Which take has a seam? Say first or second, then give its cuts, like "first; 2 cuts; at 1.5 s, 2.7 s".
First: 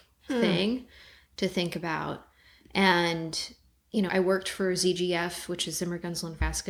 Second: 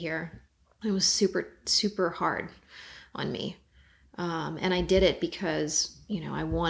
first; 1 cut; at 4.1 s